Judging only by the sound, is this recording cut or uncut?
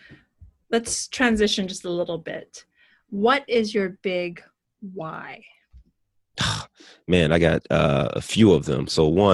uncut